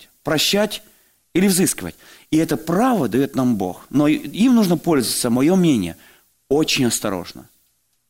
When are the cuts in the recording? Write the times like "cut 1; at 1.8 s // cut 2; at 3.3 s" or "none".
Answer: none